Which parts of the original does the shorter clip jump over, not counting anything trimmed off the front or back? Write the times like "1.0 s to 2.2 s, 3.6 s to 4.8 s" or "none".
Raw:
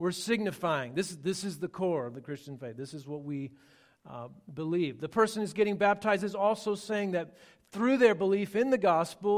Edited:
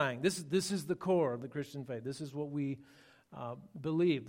none